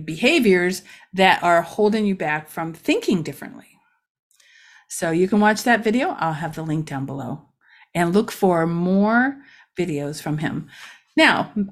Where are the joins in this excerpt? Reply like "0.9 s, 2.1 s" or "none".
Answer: none